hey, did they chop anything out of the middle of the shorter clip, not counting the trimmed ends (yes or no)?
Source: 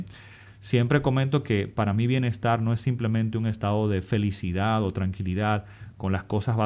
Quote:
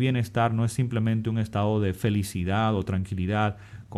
no